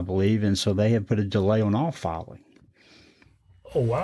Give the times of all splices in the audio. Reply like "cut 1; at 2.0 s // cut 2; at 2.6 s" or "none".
none

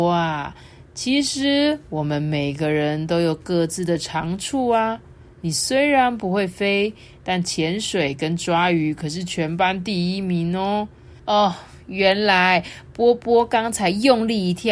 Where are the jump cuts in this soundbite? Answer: cut 1; at 11.2 s

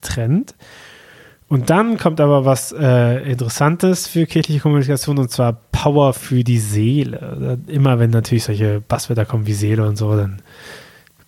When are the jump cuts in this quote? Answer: none

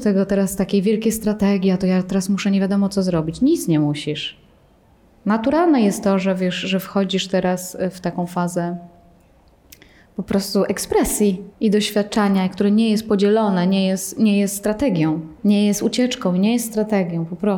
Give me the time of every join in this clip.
cut 1; at 11.5 s // cut 2; at 15.4 s

